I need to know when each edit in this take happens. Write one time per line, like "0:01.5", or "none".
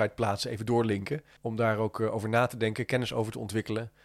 0:01.4